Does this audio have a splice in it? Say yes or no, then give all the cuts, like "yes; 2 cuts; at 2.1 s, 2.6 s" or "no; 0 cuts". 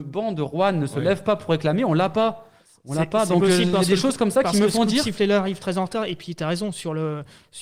no; 0 cuts